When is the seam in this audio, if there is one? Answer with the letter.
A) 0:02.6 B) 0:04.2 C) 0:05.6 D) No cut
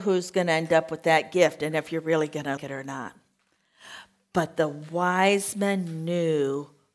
A